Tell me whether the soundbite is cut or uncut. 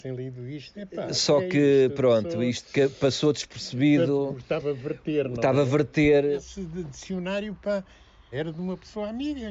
cut